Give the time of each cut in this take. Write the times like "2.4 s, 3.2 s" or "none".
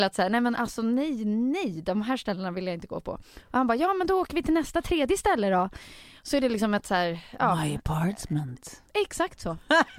none